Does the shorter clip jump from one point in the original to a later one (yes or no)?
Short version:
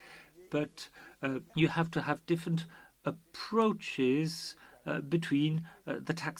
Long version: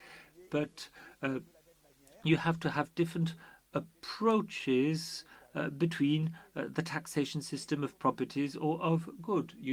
yes